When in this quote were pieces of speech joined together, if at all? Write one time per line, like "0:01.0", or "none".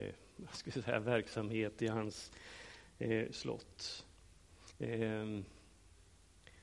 0:04.7